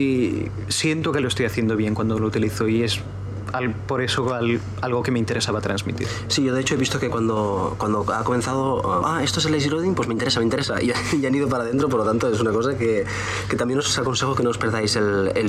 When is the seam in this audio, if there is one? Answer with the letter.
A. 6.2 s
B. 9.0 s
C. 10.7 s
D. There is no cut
B